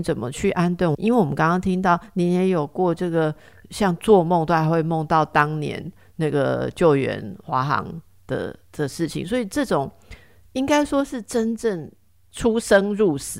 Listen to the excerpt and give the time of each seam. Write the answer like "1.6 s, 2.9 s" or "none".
0.9 s